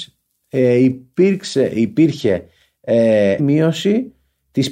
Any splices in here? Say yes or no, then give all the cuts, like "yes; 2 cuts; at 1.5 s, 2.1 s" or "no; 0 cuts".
yes; 1 cut; at 3.4 s